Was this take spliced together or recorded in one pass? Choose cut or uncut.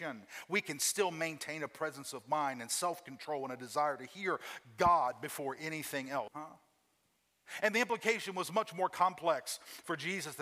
cut